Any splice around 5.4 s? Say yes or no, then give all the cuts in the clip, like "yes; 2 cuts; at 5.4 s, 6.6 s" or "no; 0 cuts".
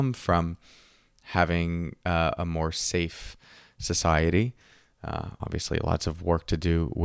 yes; 1 cut; at 5.4 s